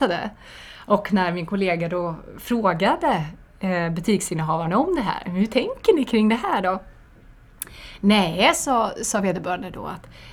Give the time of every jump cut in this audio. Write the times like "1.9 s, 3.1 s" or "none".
none